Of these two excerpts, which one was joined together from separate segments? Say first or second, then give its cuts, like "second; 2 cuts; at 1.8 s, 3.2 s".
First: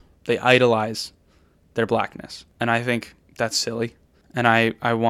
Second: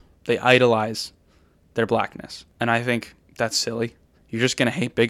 second; 1 cut; at 4.2 s